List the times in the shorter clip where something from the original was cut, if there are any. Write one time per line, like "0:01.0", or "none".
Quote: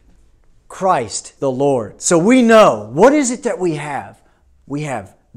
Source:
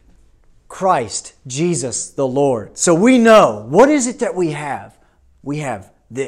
0:01.4